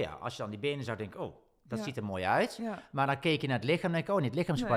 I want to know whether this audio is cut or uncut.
uncut